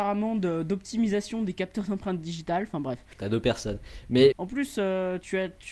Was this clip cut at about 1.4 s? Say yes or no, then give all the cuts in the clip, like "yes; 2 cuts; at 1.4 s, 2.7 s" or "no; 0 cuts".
no; 2 cuts; at 3.1 s, 4.3 s